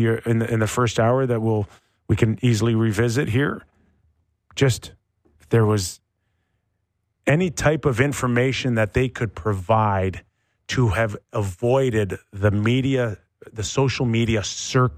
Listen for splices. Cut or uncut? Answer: uncut